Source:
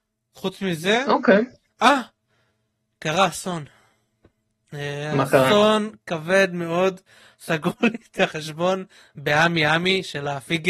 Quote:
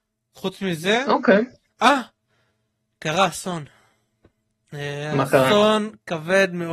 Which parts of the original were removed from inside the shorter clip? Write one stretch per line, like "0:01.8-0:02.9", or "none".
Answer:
none